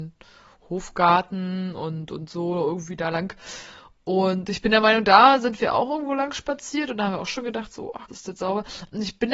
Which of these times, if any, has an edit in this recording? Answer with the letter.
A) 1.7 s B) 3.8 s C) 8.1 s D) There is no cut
C